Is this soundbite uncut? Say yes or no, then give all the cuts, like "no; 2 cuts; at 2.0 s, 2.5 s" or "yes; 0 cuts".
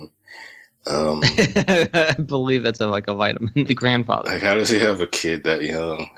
no; 1 cut; at 3.7 s